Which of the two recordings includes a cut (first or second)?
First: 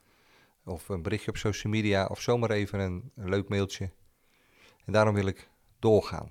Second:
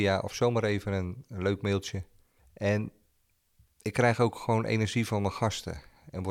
second